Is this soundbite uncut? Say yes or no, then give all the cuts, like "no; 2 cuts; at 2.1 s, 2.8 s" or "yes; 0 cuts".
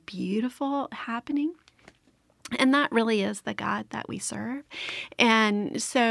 yes; 0 cuts